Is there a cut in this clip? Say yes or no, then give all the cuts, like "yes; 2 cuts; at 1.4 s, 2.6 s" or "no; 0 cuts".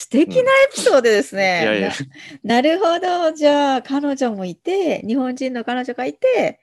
no; 0 cuts